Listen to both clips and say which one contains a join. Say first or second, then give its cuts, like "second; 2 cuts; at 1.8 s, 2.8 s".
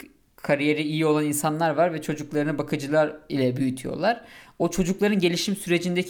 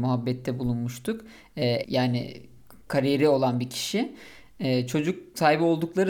second; 1 cut; at 1.8 s